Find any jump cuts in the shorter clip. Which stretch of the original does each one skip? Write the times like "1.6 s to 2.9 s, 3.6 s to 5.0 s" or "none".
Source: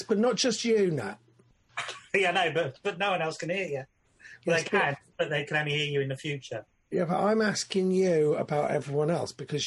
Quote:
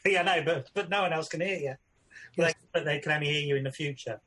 4.6 s to 4.9 s